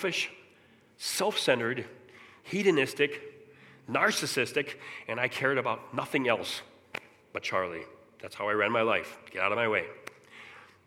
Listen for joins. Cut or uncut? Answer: uncut